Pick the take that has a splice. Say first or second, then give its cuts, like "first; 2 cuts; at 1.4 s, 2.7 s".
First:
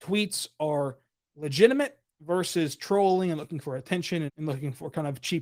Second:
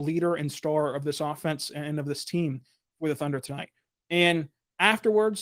first; 1 cut; at 4.3 s